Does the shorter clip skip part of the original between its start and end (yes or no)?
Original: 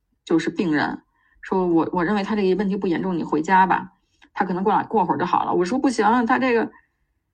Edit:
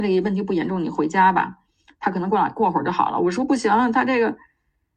no